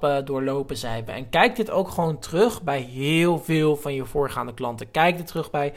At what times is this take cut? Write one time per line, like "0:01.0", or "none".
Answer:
0:01.1